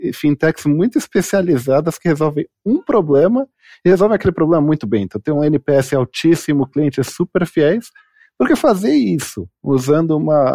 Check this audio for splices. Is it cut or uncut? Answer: uncut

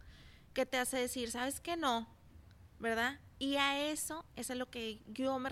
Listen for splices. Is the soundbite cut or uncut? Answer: uncut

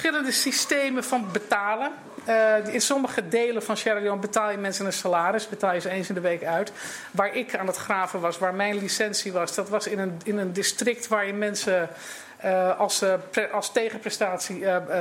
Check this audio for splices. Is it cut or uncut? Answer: uncut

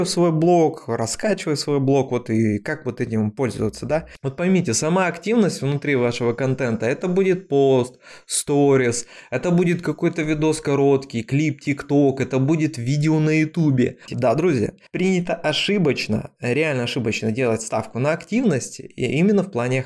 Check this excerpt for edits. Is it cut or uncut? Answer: cut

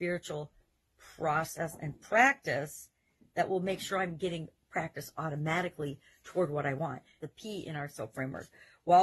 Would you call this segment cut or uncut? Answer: cut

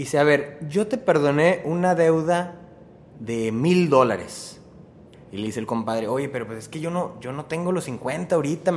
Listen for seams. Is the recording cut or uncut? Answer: cut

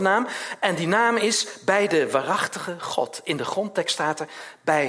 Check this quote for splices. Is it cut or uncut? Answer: uncut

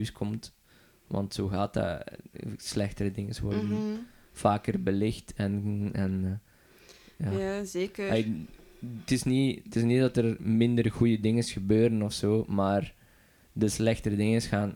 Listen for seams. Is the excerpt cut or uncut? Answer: uncut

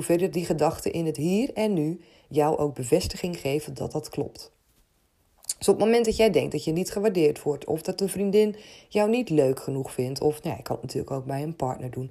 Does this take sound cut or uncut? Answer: uncut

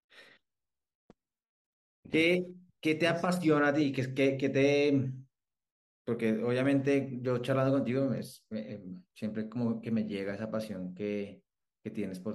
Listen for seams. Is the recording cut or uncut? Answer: cut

